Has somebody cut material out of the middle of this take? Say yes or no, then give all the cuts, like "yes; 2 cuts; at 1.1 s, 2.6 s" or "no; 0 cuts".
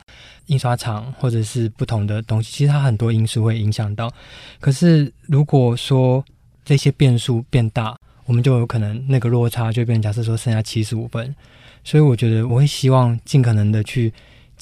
yes; 1 cut; at 12.5 s